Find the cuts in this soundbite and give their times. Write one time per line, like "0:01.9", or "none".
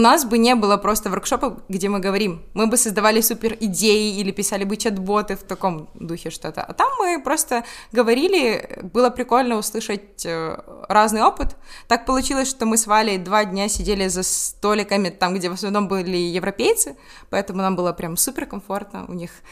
none